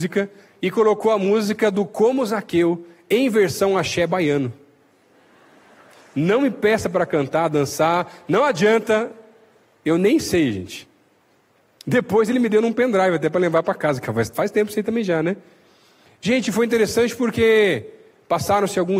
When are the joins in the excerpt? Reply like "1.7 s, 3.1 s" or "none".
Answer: none